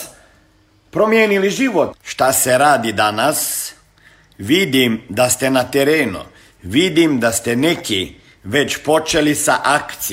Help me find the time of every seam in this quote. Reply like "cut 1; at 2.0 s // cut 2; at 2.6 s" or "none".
cut 1; at 1.9 s